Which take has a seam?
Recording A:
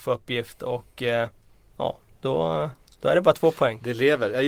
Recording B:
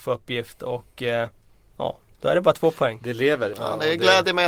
B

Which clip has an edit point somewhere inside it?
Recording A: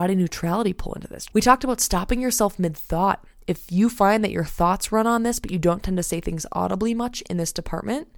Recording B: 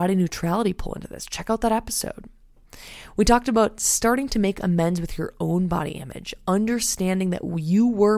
A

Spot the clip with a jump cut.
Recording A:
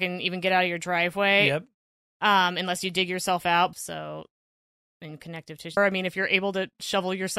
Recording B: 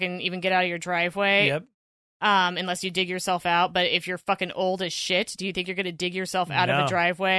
A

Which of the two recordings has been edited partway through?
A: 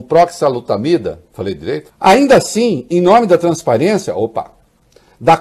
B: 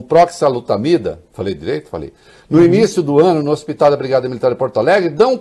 A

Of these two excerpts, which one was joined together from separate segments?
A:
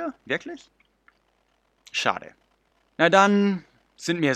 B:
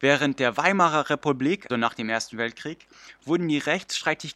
B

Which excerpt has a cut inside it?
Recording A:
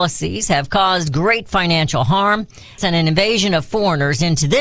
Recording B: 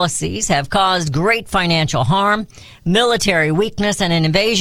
A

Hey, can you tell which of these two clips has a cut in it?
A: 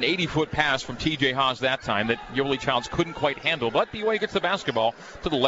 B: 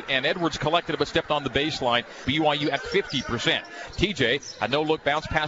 B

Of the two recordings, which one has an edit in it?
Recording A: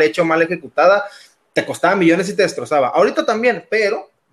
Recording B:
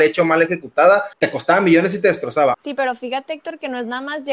B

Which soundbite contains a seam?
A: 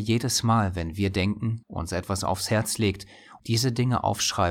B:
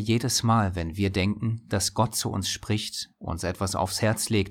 A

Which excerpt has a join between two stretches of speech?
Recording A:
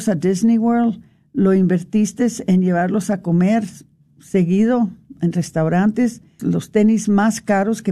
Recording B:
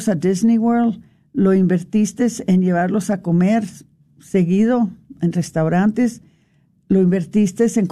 A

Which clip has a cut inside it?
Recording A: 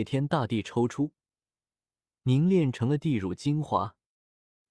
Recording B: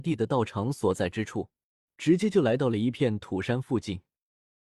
B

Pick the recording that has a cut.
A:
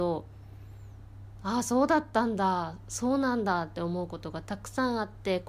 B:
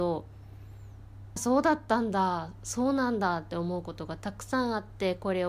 B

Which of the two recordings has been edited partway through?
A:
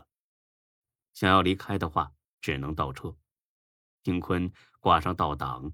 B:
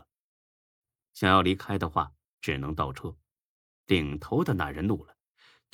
B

